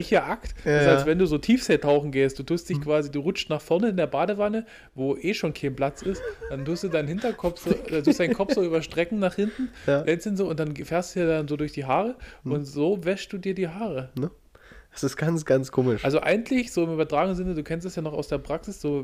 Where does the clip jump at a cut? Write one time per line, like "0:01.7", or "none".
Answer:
none

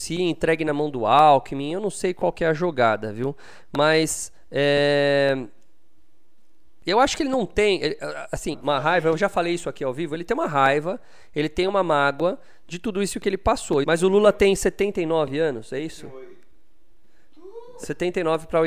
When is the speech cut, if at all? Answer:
0:08.5
0:13.8

